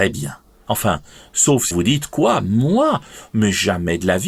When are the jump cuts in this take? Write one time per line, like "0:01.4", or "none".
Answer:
0:01.7